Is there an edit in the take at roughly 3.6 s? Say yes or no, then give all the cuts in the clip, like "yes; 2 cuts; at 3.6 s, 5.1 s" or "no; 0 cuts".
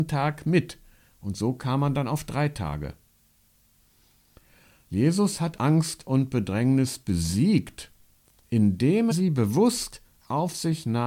no; 2 cuts; at 5.6 s, 9.1 s